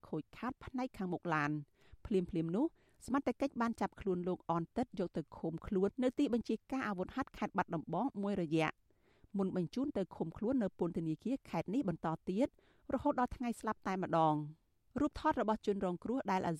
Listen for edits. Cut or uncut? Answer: cut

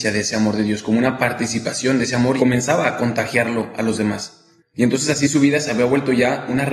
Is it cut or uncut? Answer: cut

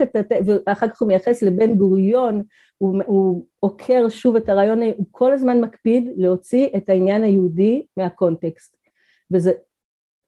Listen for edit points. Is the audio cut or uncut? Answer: uncut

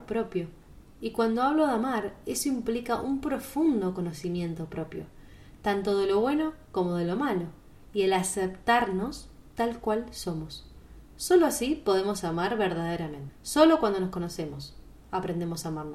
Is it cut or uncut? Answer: uncut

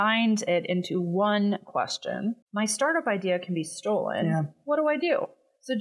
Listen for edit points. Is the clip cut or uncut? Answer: cut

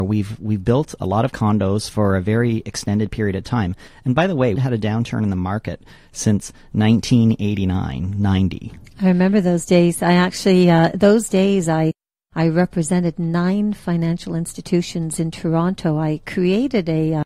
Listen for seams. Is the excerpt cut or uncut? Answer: cut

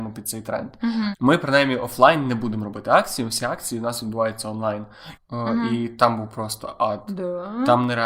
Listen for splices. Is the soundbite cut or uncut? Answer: cut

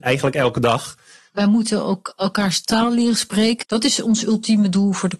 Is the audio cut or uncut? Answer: cut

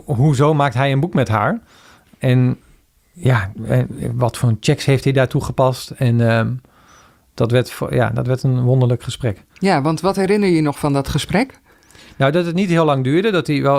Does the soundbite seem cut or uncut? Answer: uncut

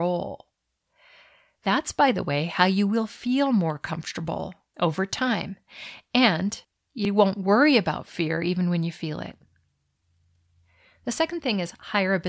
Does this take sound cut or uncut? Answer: uncut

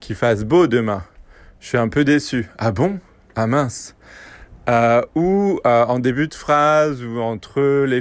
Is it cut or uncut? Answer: uncut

